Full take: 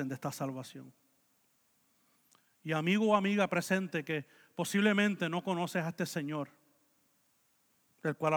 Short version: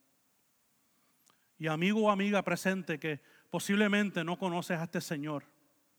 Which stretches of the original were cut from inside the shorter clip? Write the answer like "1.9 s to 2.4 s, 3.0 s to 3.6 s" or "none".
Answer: none

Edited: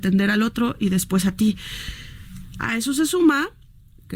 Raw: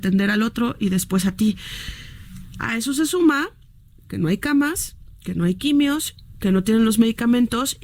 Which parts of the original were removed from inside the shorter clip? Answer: none

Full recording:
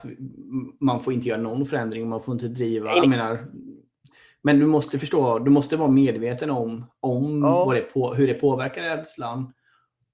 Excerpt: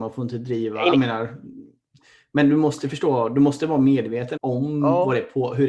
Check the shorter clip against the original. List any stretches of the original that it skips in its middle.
6.5 s to 7.0 s

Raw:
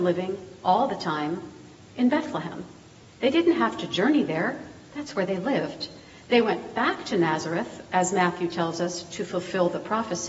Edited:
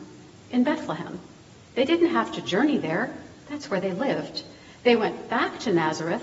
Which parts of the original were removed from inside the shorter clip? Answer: none

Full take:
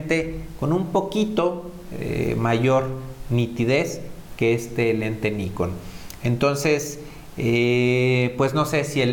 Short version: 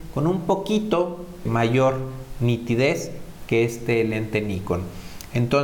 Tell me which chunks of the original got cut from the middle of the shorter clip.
1.9 s to 2.3 s

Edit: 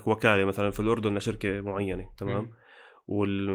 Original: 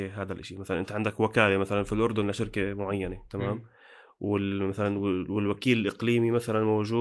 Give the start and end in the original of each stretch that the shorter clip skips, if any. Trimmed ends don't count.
none

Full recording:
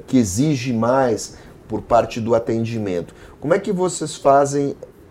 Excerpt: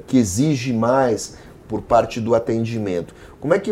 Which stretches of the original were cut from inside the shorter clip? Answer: none

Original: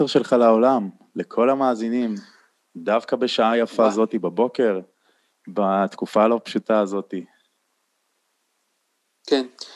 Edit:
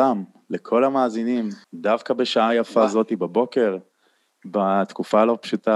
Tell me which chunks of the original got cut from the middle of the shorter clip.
2.3 s to 2.7 s

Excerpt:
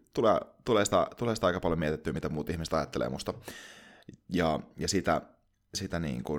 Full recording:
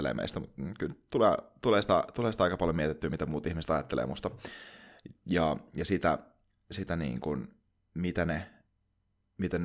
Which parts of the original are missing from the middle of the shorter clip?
none

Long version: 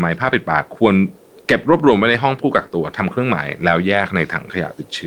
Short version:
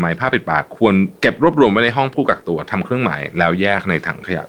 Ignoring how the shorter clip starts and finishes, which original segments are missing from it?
1.2 s to 1.4 s

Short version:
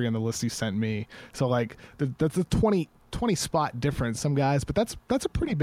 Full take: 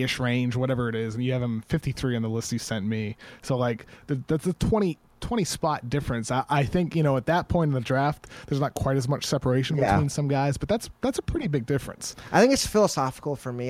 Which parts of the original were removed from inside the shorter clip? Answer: 6.2 s to 10.1 s

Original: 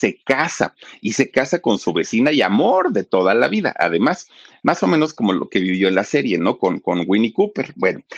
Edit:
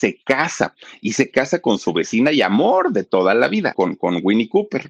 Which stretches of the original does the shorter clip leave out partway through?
3.7 s to 6.6 s

